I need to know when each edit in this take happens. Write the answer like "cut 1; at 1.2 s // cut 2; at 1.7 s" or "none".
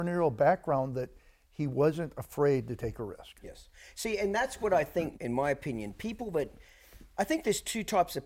cut 1; at 5.1 s